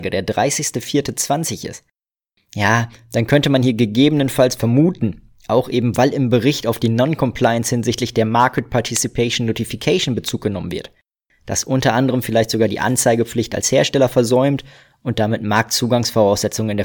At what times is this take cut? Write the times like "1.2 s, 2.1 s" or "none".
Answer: none